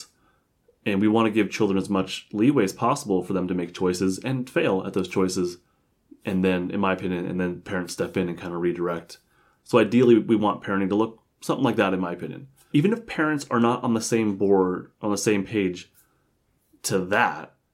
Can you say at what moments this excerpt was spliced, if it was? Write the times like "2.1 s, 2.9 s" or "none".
9.6 s